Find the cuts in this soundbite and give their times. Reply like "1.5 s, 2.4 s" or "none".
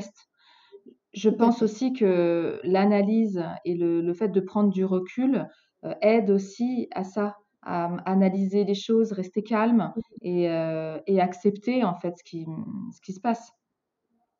none